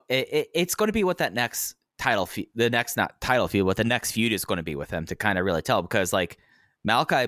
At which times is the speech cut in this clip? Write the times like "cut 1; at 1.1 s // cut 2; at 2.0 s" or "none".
none

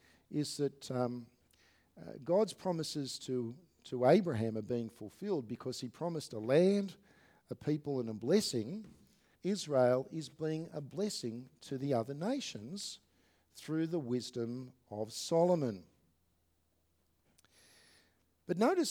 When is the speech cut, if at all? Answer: cut 1; at 9.3 s

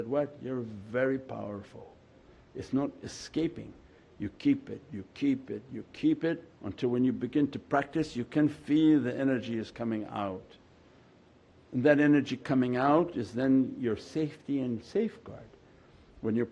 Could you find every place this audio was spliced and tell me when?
none

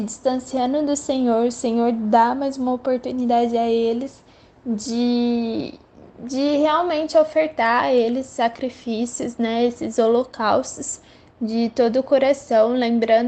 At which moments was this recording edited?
none

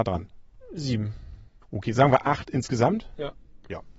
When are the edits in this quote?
cut 1; at 1.6 s

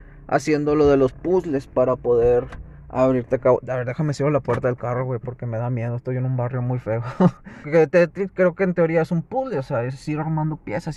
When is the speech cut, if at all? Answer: cut 1; at 7.6 s

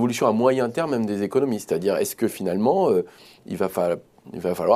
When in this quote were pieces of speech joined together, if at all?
none

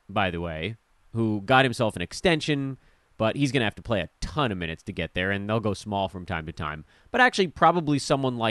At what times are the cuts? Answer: none

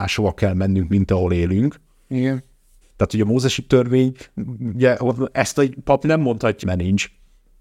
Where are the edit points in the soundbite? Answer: cut 1; at 2.8 s // cut 2; at 6.6 s

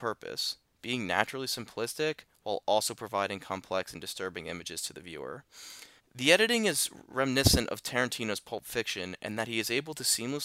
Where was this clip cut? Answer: cut 1; at 6.0 s

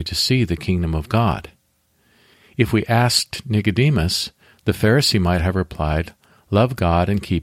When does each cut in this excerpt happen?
none

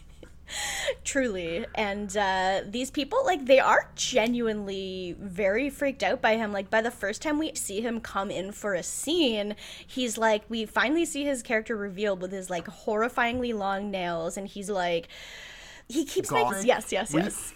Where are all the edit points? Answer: cut 1; at 7.5 s // cut 2; at 14.7 s // cut 3; at 16.5 s

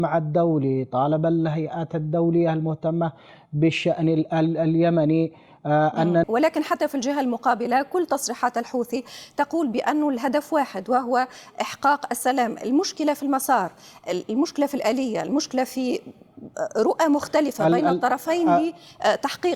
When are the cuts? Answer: cut 1; at 6.2 s

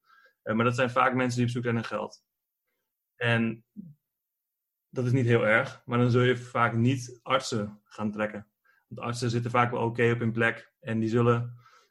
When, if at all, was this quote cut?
none

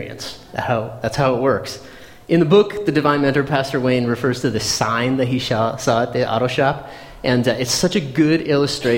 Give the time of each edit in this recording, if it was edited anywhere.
none

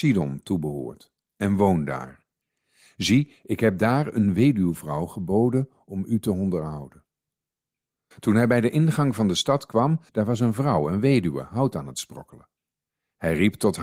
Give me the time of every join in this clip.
cut 1; at 8.1 s // cut 2; at 10.1 s

